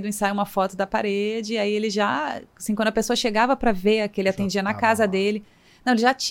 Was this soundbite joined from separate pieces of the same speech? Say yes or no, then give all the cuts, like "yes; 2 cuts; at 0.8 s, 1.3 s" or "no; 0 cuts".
no; 0 cuts